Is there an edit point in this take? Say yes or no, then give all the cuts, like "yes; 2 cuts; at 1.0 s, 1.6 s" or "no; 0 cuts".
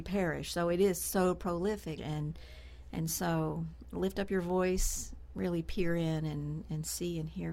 yes; 2 cuts; at 2.0 s, 5.3 s